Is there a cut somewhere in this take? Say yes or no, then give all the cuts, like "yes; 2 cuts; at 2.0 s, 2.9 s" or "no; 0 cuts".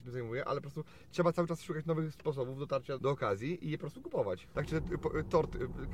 yes; 2 cuts; at 3.0 s, 4.5 s